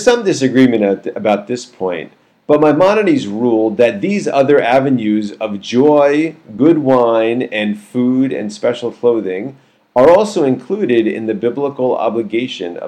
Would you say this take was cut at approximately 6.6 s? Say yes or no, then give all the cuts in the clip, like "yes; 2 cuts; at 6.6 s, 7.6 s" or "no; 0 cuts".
no; 0 cuts